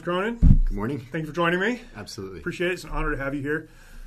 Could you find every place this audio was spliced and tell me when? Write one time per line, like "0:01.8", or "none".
none